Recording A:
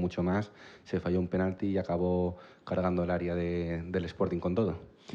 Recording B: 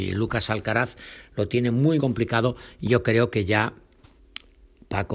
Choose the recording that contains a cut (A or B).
B